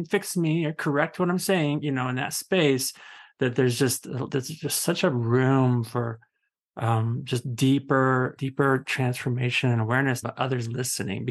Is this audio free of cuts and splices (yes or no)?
no